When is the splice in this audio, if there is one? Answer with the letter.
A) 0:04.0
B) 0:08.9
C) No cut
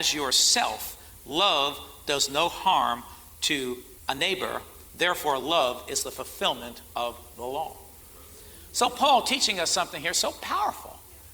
A